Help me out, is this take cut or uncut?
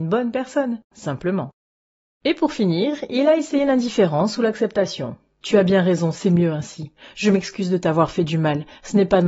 cut